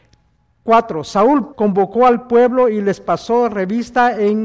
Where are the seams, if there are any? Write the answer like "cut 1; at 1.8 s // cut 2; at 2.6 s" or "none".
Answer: cut 1; at 1.5 s